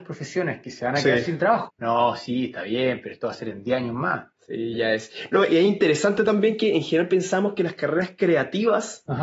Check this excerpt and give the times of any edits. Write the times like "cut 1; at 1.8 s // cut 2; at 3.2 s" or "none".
cut 1; at 1.7 s // cut 2; at 4.7 s